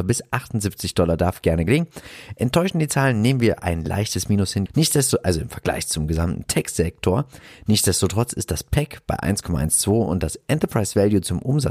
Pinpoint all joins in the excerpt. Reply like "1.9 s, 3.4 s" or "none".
4.7 s